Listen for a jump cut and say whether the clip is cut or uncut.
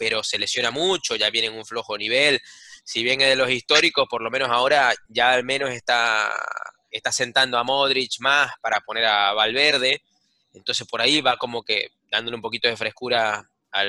uncut